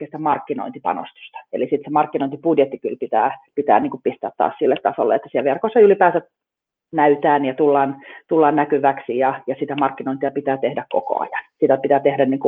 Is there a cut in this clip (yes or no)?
no